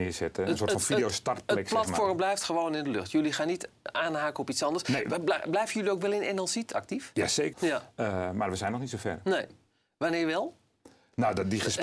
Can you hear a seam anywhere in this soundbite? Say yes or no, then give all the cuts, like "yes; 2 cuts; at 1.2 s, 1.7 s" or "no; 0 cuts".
yes; 1 cut; at 7.5 s